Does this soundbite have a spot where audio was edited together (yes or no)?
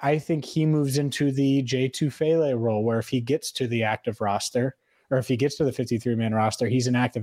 no